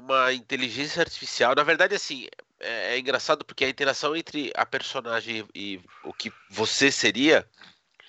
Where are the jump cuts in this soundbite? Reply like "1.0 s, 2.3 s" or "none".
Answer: 5.8 s